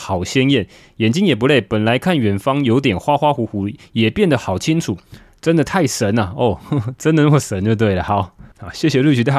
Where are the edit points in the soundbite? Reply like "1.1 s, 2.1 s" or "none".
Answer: none